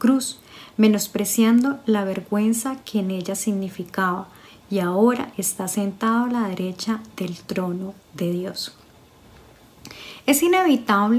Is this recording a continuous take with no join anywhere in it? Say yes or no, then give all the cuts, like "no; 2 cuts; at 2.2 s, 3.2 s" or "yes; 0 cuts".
yes; 0 cuts